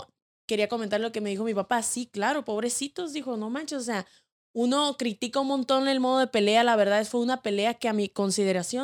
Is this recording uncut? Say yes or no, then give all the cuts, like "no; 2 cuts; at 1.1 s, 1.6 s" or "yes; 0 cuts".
yes; 0 cuts